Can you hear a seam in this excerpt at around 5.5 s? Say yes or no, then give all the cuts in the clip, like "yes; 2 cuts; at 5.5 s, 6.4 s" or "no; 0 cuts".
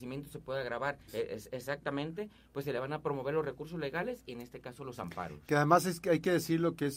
no; 1 cut; at 1.1 s